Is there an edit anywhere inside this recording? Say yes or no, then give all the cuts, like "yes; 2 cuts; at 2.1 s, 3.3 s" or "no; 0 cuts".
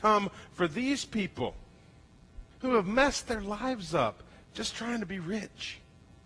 yes; 1 cut; at 2.5 s